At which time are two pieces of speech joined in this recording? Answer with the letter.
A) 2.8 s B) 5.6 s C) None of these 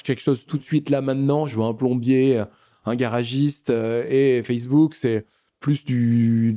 C